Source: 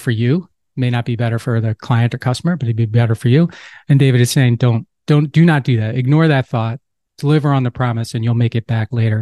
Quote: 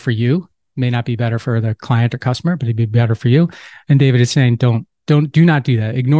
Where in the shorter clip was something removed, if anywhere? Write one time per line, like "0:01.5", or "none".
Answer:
none